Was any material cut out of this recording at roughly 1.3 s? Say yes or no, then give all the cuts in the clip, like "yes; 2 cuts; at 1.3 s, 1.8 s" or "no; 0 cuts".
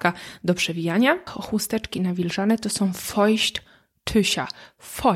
yes; 1 cut; at 1.3 s